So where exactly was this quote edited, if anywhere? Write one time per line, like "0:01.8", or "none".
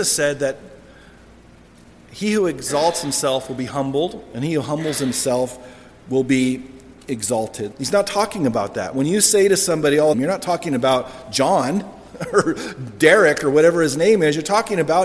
0:07.7
0:10.1